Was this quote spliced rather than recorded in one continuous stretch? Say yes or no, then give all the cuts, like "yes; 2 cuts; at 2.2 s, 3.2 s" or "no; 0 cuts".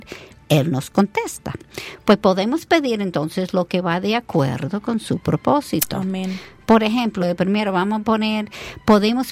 no; 0 cuts